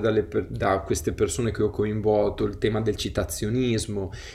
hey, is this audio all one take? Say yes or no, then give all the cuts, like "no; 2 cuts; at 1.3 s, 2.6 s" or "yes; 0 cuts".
yes; 0 cuts